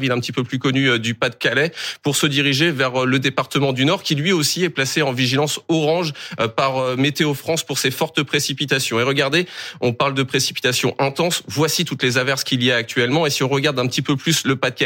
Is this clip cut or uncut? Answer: uncut